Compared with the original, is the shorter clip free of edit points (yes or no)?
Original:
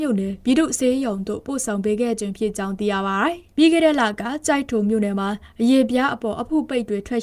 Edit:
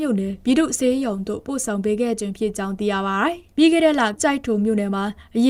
no